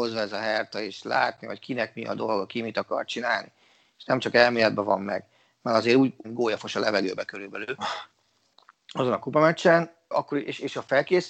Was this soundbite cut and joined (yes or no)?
yes